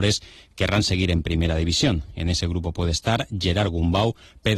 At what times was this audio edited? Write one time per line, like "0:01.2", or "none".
none